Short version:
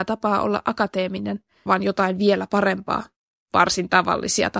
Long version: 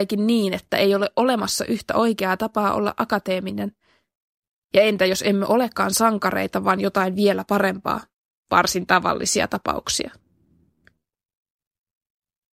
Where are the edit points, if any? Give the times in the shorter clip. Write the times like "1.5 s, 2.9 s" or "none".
1.7 s